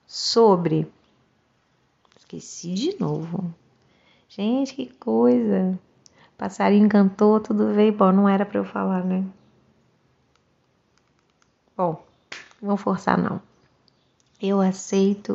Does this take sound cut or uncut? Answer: uncut